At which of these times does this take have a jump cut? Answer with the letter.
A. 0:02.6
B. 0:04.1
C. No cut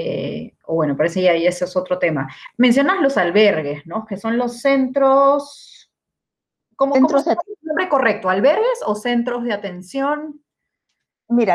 C